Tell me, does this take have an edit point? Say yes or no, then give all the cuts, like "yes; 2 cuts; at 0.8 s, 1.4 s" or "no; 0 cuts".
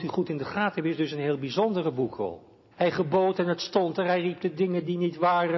yes; 1 cut; at 2.7 s